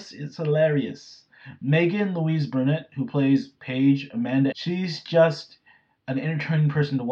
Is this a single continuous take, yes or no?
no